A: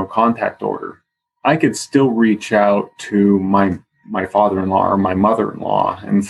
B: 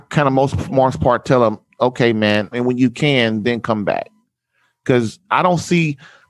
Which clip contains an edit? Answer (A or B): B